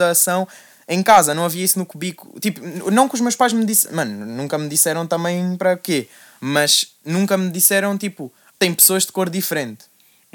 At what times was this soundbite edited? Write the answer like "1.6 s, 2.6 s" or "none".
8.5 s